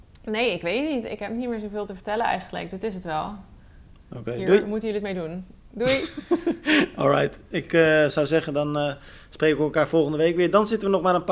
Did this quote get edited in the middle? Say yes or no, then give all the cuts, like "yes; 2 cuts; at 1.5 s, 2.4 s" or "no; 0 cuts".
no; 0 cuts